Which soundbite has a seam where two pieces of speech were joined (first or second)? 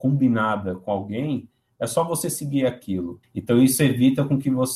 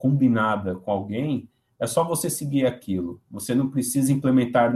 first